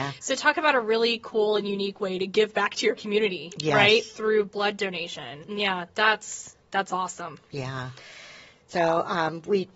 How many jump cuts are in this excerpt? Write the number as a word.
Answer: one